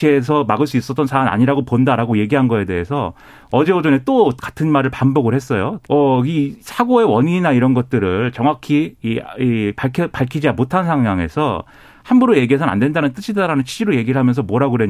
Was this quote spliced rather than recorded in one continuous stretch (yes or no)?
yes